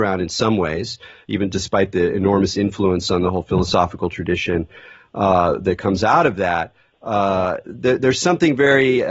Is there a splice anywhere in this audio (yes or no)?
no